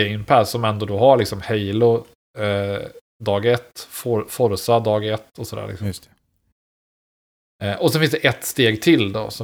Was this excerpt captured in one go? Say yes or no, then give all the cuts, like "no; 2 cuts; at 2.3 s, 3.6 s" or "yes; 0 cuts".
yes; 0 cuts